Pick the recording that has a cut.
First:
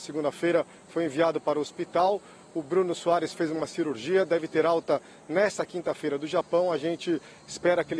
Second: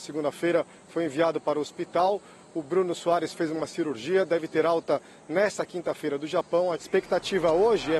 second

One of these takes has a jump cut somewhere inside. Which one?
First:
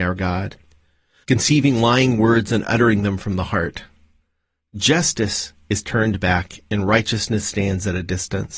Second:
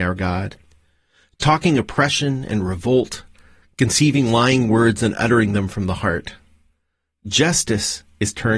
first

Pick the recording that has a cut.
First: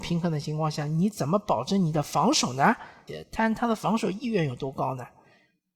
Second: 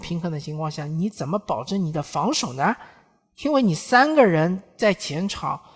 first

